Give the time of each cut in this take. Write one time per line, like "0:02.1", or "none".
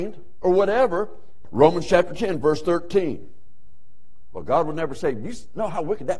0:01.4